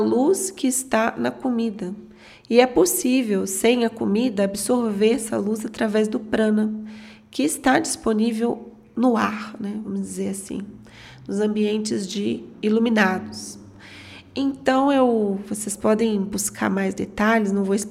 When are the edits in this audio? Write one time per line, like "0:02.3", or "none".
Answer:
none